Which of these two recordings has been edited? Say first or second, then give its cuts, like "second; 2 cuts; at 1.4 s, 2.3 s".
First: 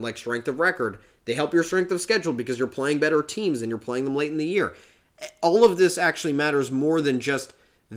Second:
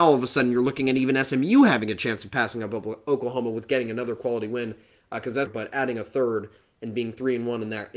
second; 1 cut; at 5.5 s